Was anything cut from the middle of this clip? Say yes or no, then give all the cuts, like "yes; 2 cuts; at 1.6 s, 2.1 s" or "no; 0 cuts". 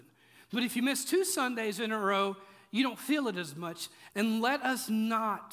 yes; 1 cut; at 4.1 s